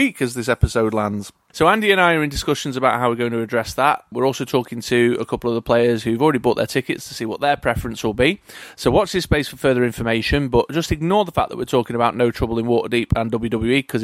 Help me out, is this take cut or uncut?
uncut